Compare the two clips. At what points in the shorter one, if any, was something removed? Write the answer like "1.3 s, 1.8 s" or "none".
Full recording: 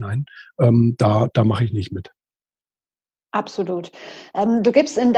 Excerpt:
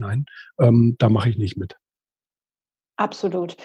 1.0 s